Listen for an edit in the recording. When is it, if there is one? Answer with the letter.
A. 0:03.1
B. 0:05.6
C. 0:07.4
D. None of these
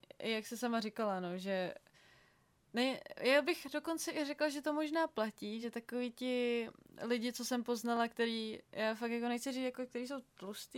D